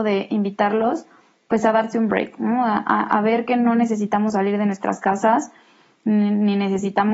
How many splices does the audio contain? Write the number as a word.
zero